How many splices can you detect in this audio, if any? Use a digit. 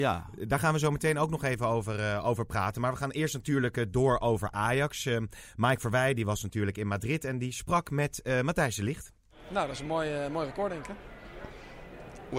0